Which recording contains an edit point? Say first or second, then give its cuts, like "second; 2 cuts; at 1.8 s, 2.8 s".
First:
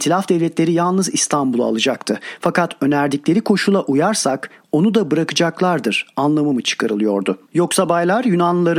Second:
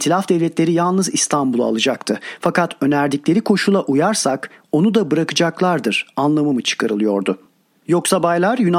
first; 1 cut; at 7.5 s